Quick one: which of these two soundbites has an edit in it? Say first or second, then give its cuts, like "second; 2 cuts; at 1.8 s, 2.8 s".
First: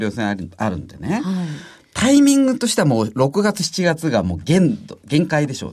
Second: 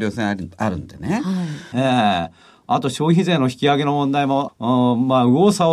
second; 2 cuts; at 1.7 s, 4.5 s